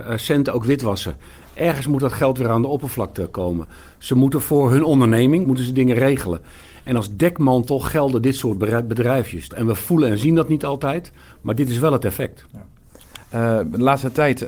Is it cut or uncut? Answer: cut